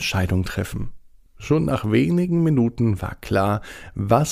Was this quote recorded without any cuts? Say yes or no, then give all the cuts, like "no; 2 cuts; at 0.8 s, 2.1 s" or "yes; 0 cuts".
no; 1 cut; at 1.3 s